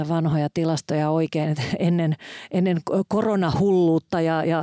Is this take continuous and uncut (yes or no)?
yes